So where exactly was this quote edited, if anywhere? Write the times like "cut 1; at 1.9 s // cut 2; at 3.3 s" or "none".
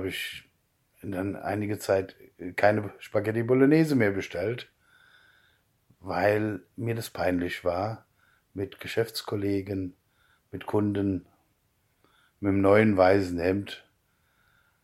none

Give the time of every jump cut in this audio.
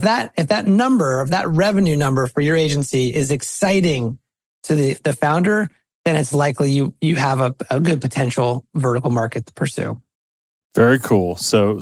none

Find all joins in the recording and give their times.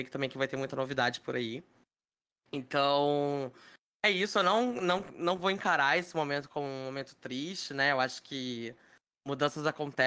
none

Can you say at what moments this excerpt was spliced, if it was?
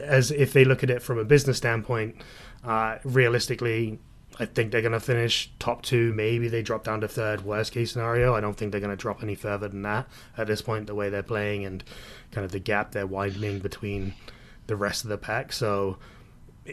none

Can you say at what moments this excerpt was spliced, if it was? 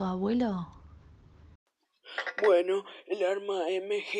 none

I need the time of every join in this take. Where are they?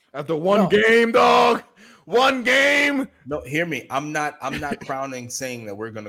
none

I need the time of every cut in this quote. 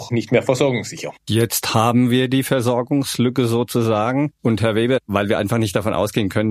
cut 1; at 1.2 s

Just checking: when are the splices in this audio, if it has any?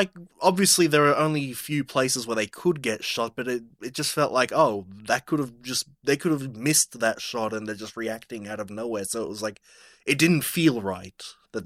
none

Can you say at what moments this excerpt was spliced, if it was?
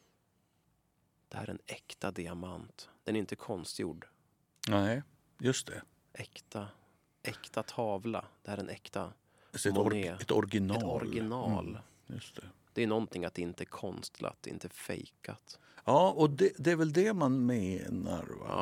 none

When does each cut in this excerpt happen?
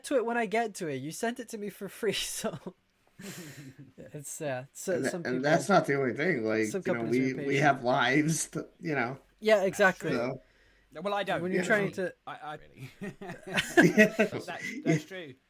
cut 1; at 12.6 s // cut 2; at 14.3 s

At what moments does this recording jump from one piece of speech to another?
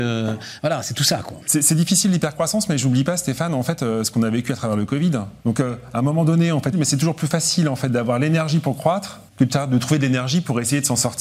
cut 1; at 5.4 s // cut 2; at 6.7 s // cut 3; at 9.3 s

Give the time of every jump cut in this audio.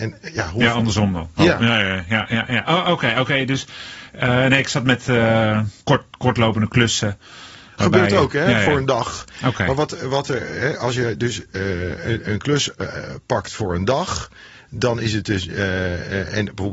cut 1; at 5.8 s

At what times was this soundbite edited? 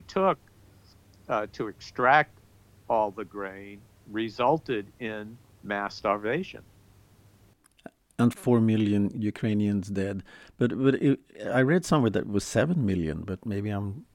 none

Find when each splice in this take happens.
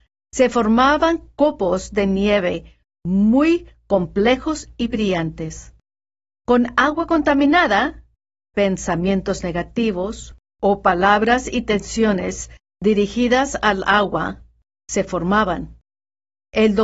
cut 1; at 14.7 s

